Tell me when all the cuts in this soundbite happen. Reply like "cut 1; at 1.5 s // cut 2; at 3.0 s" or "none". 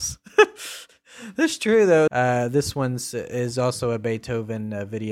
cut 1; at 2.1 s